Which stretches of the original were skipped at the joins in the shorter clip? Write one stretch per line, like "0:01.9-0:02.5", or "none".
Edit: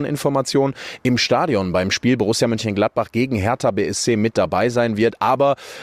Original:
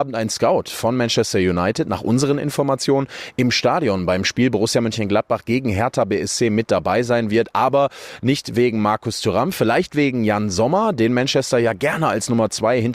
none

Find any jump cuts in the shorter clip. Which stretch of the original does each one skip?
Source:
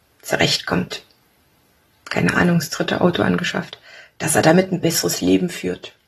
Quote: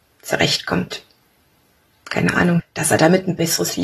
0:02.6-0:04.0

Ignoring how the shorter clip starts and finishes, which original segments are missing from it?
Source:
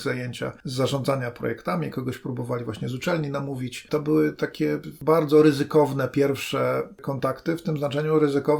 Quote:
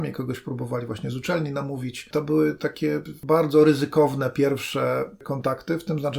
none

